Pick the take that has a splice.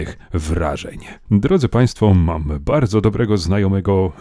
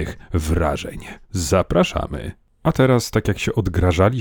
first; 1 cut; at 1.2 s

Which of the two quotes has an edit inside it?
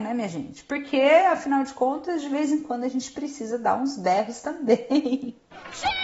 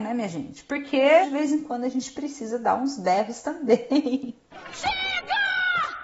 second; 1 cut; at 1.2 s

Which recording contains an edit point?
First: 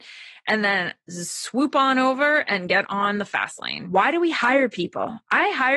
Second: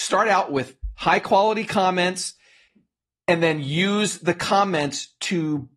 first; 1 cut; at 3.8 s

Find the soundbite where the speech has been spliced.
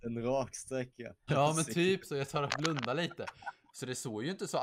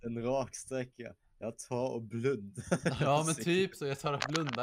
first; 2 cuts; at 1.3 s, 3.7 s

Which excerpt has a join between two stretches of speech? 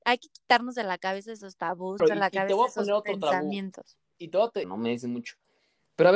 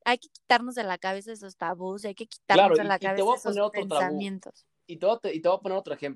first; 2 cuts; at 2.0 s, 4.6 s

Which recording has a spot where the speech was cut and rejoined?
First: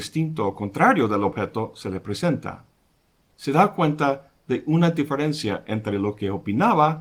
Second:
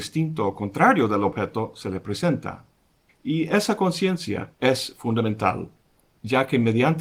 second; 2 cuts; at 3.1 s, 4.5 s

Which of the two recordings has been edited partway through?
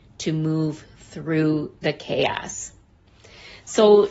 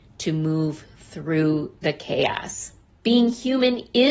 second; 1 cut; at 3.0 s

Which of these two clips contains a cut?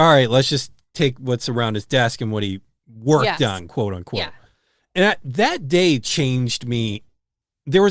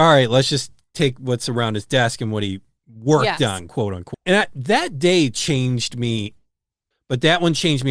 second; 2 cuts; at 4.1 s, 6.9 s

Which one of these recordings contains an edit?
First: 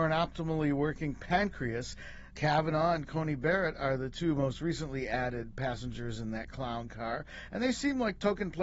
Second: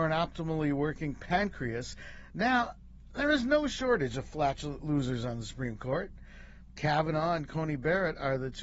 first; 1 cut; at 2.3 s

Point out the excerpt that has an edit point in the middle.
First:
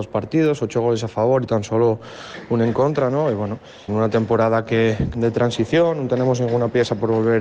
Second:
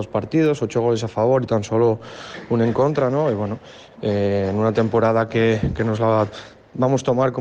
first; 2 cuts; at 3.9 s, 5.1 s

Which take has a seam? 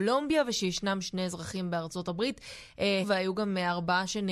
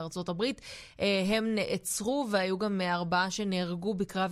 first; 1 cut; at 3.0 s

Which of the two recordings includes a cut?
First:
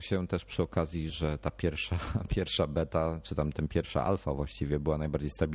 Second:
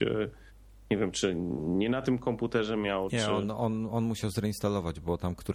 first; 1 cut; at 1.1 s

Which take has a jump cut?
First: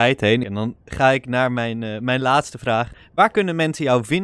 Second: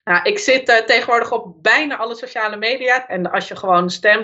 second; 1 cut; at 3.1 s

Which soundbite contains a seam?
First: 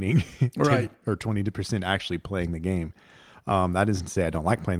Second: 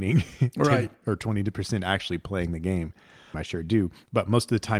second; 1 cut; at 3.3 s

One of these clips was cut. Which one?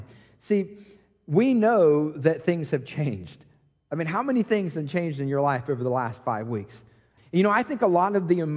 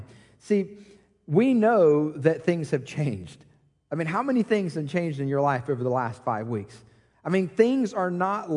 first; 1 cut; at 7.2 s

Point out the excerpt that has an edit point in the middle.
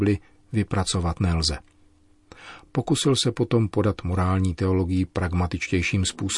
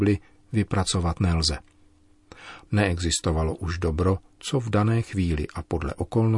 second; 2 cuts; at 2.7 s, 4.4 s

